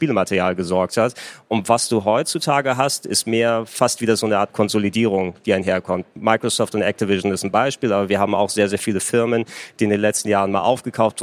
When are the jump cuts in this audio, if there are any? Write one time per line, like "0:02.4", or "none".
none